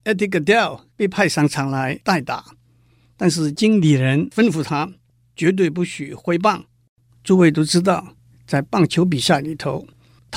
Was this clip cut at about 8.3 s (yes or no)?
no